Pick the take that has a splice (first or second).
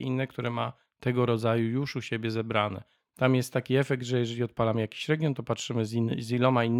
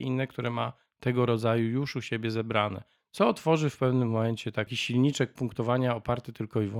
first